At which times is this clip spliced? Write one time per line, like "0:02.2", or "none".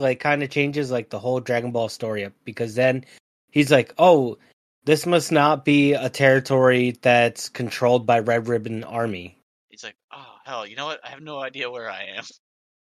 0:09.6